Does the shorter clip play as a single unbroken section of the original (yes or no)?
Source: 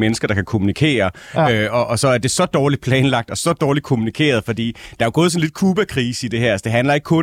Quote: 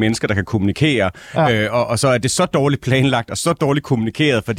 yes